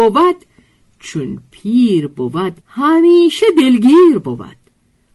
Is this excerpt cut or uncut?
cut